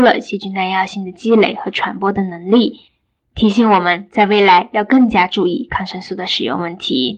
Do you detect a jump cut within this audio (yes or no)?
no